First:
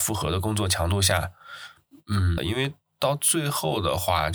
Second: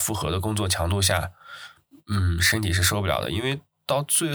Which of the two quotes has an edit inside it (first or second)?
first